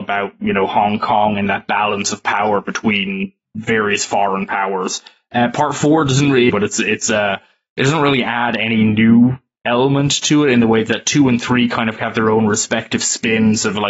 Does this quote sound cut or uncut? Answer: cut